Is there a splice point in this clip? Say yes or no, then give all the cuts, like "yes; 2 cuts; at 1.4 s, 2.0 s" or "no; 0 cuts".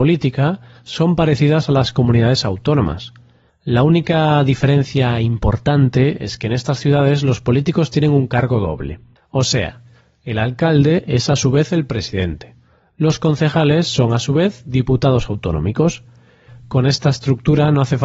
no; 0 cuts